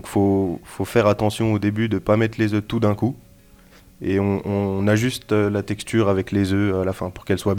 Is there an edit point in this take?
no; 0 cuts

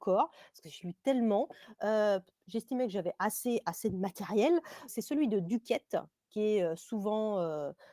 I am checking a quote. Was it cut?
yes; 1 cut; at 4.9 s

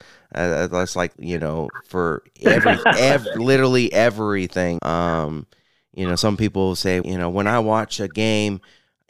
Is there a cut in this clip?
yes; 3 cuts; at 1.1 s, 4.8 s, 7.0 s

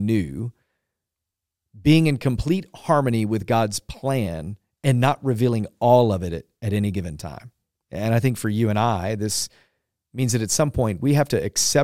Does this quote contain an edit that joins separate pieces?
yes; 1 cut; at 7.8 s

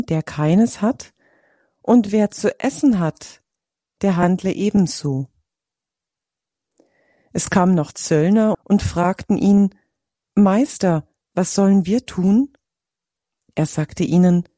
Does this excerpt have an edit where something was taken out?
yes; 1 cut; at 8.5 s

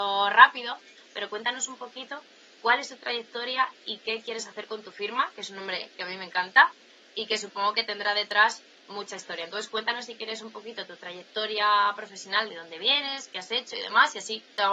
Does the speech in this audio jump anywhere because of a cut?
yes; 1 cut; at 5.3 s

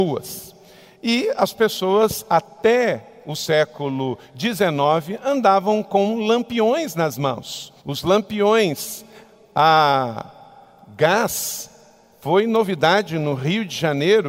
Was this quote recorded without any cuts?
no; 1 cut; at 7.8 s

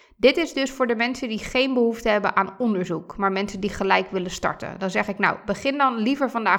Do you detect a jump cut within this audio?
no; 0 cuts

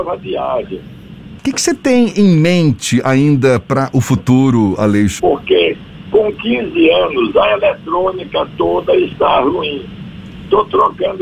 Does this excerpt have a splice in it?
yes; 2 cuts; at 1.4 s, 5.2 s

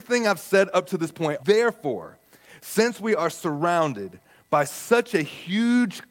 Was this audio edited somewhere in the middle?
yes; 1 cut; at 1.4 s

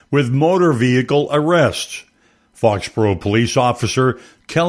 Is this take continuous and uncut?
yes; 0 cuts

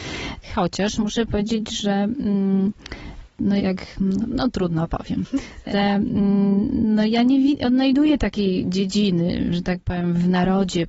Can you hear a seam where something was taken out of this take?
yes; 2 cuts; at 3.6 s, 5.7 s

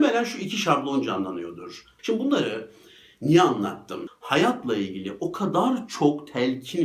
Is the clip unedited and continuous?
no; 2 cuts; at 2.0 s, 4.1 s

